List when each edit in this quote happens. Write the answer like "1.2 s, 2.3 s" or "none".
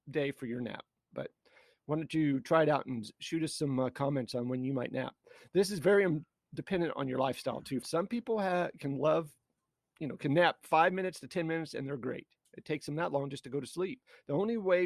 1.1 s, 7.8 s, 12.4 s